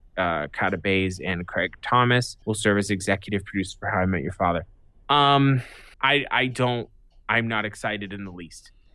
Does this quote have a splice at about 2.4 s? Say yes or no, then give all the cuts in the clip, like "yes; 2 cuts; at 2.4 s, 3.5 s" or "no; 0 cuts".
yes; 2 cuts; at 2.4 s, 5.9 s